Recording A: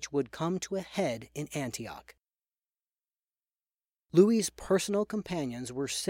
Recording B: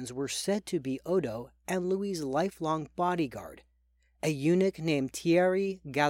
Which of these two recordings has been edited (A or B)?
A